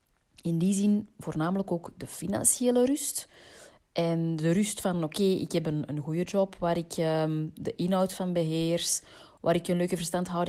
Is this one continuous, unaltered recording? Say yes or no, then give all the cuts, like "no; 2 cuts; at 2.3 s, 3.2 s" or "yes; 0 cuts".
yes; 0 cuts